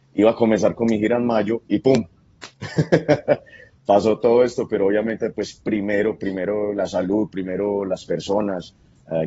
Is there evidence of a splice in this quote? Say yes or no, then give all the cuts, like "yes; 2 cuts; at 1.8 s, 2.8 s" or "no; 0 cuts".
no; 0 cuts